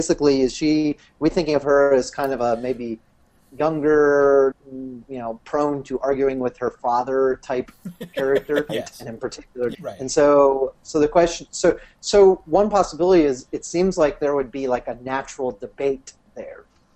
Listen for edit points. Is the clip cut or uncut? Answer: cut